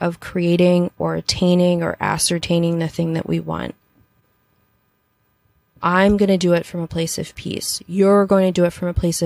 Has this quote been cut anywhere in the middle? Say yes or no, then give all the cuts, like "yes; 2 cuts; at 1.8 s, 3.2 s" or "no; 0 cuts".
no; 0 cuts